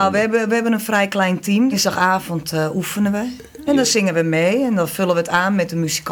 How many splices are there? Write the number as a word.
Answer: two